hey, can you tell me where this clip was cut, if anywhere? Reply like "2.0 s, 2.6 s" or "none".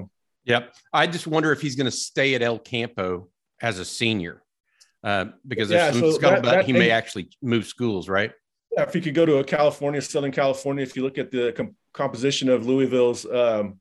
none